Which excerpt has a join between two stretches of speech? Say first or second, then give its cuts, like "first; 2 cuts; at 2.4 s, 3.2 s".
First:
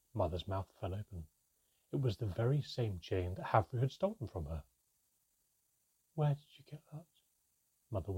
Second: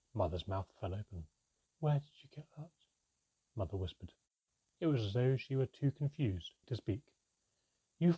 second; 3 cuts; at 1.6 s, 4.7 s, 6.6 s